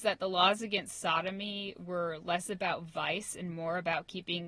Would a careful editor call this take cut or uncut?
uncut